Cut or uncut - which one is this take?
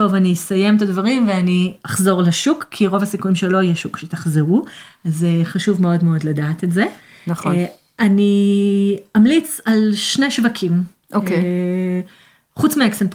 uncut